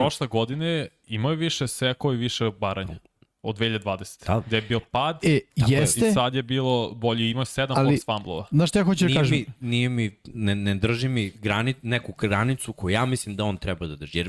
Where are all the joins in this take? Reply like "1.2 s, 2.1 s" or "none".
none